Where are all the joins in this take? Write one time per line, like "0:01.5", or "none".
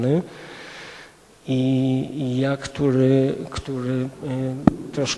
none